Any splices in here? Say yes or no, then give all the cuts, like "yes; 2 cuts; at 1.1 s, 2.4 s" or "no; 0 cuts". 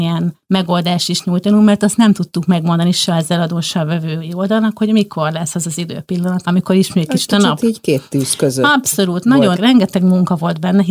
yes; 2 cuts; at 6.4 s, 9.5 s